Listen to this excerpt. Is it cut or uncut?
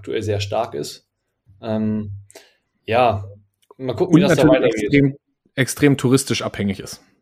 uncut